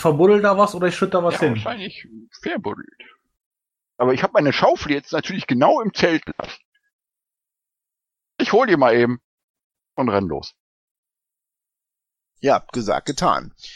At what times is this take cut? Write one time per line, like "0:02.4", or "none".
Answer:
none